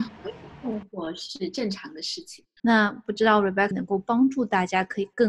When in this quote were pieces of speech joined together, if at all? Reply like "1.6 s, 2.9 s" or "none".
2.6 s, 3.7 s